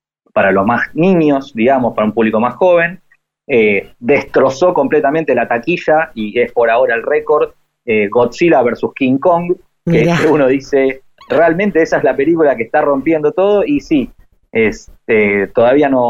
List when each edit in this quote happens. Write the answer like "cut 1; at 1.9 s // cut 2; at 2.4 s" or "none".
none